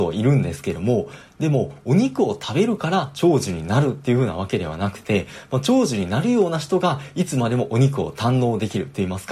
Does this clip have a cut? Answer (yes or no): no